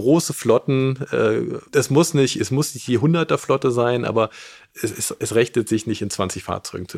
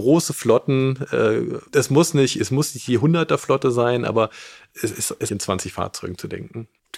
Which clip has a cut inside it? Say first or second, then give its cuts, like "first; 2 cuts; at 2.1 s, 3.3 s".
second; 1 cut; at 5.3 s